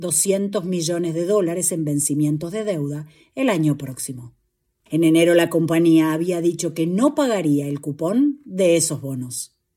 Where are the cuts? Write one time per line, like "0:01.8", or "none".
0:04.9